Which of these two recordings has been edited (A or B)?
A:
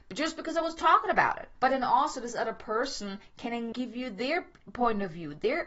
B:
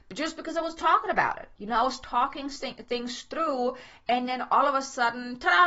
A